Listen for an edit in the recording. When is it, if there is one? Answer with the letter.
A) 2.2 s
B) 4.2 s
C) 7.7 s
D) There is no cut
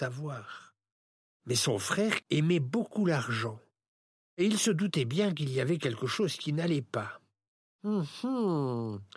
A